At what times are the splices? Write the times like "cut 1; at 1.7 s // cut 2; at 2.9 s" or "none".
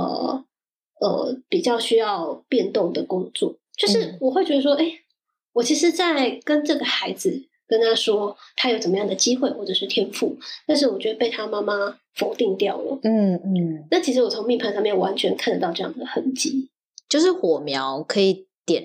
none